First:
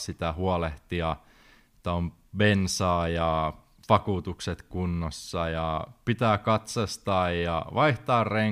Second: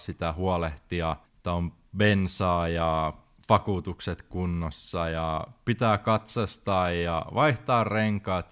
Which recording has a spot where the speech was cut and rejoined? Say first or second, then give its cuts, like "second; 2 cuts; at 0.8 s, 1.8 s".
second; 1 cut; at 1.3 s